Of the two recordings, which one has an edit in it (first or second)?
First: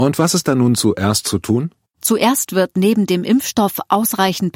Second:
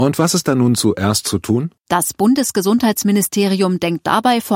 second